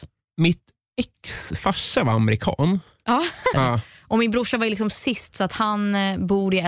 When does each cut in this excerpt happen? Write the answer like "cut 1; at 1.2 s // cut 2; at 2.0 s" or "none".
cut 1; at 3.5 s